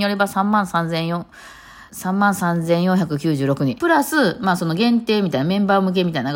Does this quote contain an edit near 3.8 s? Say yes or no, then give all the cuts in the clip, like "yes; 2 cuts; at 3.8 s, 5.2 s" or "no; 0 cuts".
yes; 2 cuts; at 1.9 s, 3.8 s